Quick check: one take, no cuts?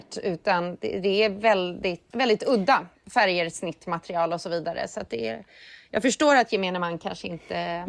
no; 1 cut; at 2.1 s

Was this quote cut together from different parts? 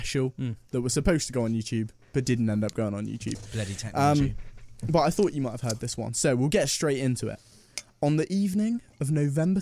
no; 0 cuts

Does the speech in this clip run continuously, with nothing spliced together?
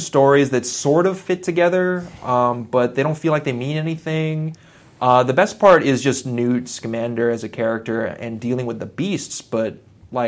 yes; 0 cuts

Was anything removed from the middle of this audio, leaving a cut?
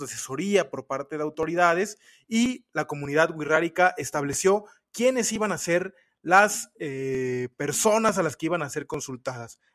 no; 0 cuts

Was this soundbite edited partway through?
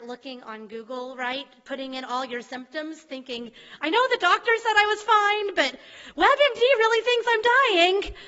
no; 0 cuts

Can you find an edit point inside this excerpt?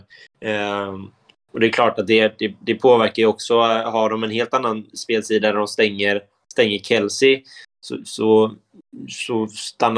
no; 0 cuts

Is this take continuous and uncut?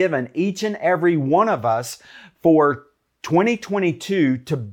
yes; 0 cuts

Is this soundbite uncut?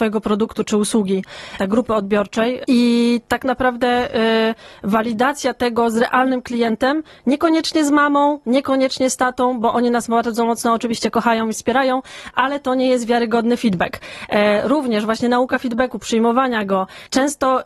no; 1 cut; at 1.6 s

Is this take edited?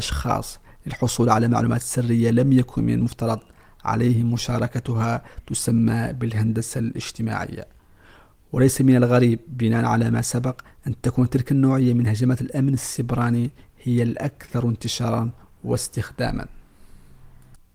no; 0 cuts

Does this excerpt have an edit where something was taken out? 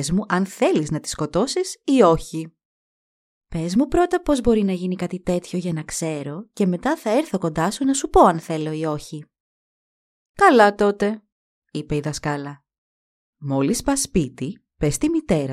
no; 0 cuts

